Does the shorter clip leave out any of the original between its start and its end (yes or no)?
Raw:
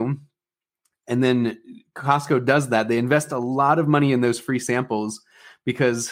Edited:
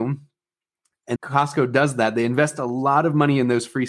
yes